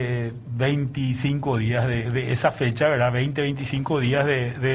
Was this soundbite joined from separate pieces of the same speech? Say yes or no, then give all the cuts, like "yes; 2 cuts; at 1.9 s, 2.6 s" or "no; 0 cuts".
yes; 1 cut; at 2.0 s